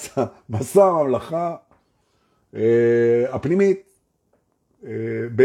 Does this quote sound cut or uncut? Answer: uncut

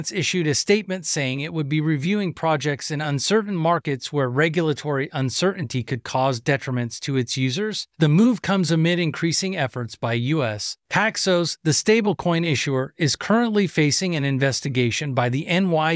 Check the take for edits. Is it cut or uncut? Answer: cut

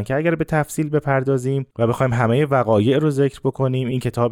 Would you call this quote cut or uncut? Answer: cut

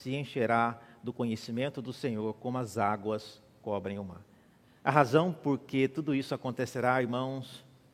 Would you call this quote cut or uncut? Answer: uncut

